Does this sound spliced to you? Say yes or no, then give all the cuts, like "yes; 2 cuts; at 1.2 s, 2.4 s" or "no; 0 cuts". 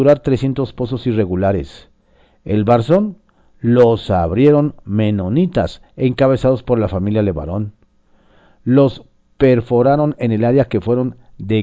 no; 0 cuts